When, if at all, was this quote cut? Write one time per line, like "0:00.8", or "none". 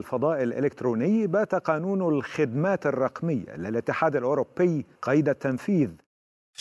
0:05.0

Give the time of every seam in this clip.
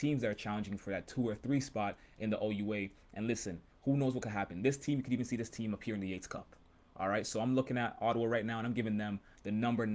none

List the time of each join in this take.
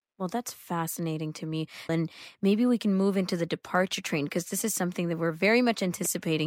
0:01.9

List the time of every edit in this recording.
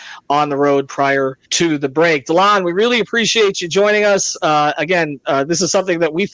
0:01.4

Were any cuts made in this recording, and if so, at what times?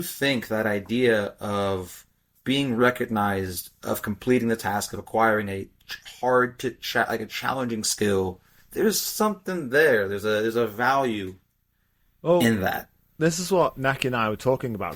none

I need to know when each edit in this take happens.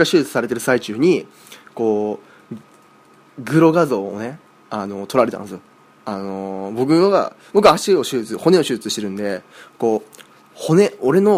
none

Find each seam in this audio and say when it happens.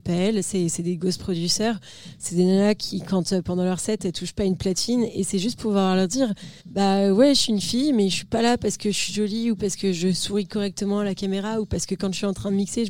0:06.6

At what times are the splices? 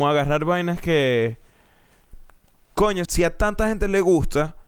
0:03.1

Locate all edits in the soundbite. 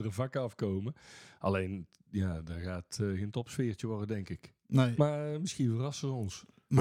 none

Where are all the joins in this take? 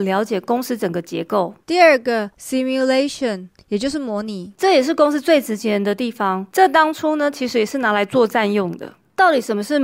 0:01.6

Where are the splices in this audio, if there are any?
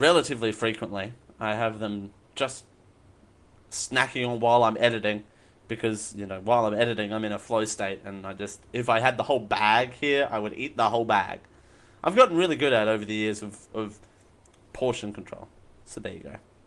none

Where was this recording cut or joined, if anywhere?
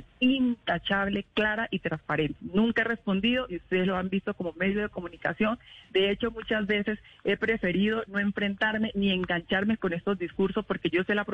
0:02.4

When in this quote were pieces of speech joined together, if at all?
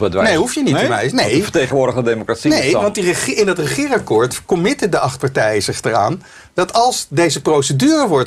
none

